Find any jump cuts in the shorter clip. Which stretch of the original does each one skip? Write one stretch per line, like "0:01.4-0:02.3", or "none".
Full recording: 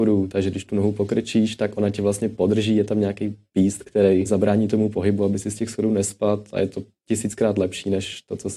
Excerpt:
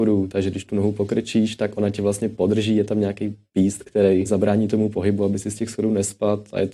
none